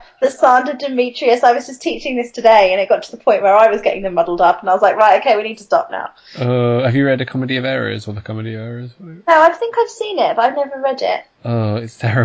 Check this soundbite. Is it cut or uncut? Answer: uncut